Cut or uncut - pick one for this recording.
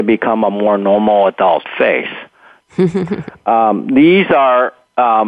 cut